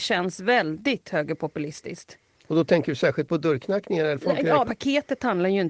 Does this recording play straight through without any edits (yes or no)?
no